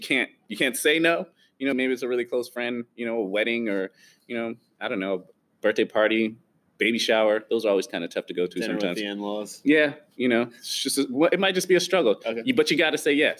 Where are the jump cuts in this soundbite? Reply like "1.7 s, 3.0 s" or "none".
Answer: 1.7 s